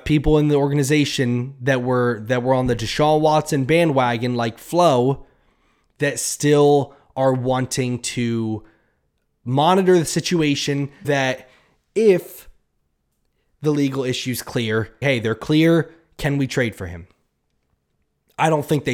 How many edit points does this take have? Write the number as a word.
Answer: two